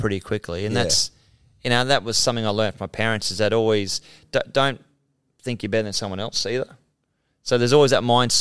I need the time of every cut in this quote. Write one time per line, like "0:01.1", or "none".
none